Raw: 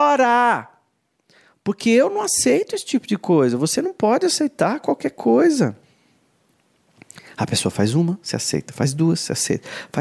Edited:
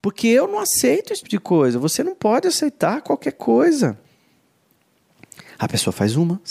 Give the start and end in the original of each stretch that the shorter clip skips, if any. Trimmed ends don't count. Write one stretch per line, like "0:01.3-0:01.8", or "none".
0:02.8-0:03.0